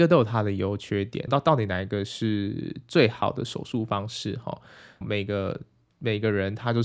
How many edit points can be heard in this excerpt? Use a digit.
2